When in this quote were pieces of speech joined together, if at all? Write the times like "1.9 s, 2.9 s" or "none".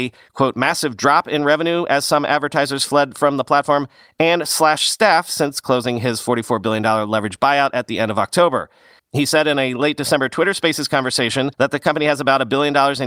9.0 s, 11.5 s